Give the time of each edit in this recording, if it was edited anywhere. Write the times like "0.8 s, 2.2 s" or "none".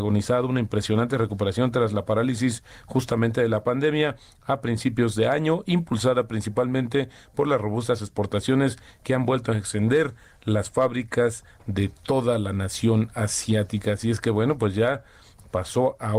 none